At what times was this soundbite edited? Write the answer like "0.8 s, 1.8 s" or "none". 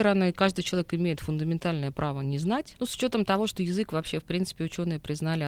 2.8 s